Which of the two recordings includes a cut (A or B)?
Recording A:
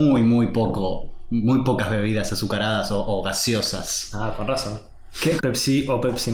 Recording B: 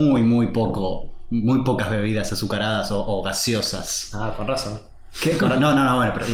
A